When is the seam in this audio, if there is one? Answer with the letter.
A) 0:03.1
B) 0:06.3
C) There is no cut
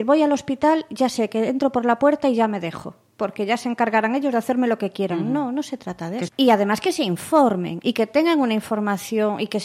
B